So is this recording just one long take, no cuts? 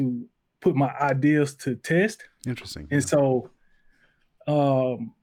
yes; 0 cuts

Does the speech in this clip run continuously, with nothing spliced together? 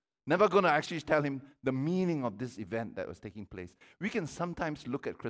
yes; 0 cuts

